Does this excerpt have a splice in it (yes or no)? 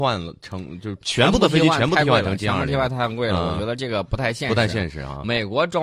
no